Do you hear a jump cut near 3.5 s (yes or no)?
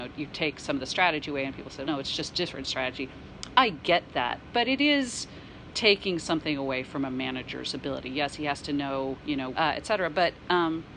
no